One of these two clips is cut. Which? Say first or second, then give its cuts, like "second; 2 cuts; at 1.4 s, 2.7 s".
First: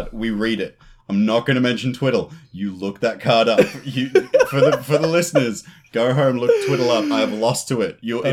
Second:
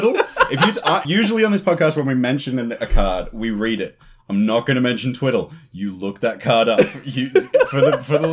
second; 1 cut; at 1.0 s